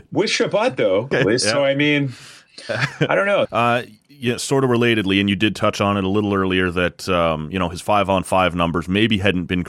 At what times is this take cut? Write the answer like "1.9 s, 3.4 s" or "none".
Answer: 1.1 s, 3.5 s